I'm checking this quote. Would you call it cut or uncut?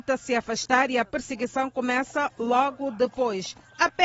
uncut